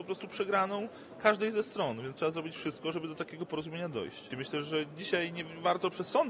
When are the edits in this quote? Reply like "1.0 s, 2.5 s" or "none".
4.3 s